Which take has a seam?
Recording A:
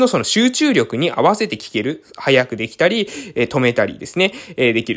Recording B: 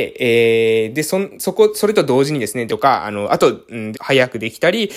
B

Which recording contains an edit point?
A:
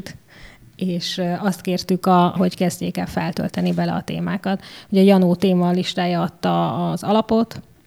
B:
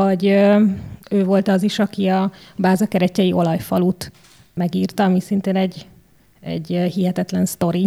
A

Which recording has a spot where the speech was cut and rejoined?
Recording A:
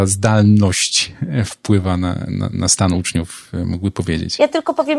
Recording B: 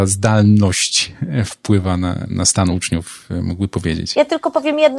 B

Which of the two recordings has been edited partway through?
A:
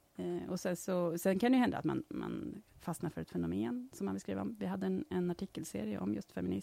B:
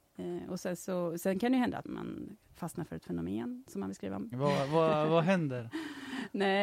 B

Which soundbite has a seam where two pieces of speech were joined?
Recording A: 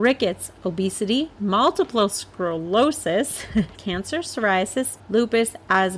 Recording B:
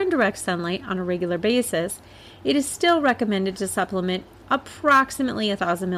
A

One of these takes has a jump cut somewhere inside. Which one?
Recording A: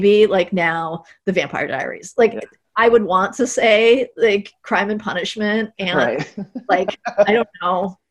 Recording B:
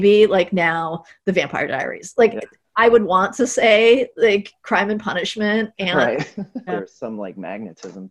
B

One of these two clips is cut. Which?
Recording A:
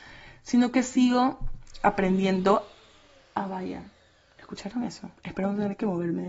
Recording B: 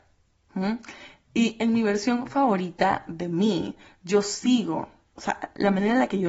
A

